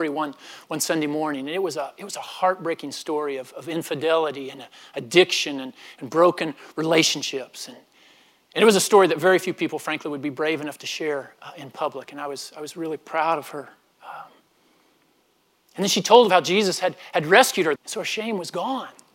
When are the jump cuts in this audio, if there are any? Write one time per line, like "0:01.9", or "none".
0:17.8